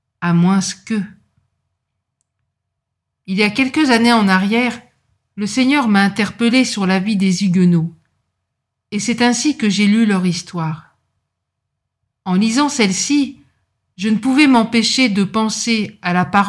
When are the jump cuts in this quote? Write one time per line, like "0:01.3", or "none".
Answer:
0:03.2